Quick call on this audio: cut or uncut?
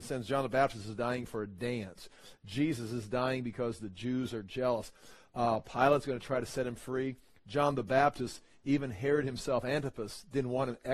uncut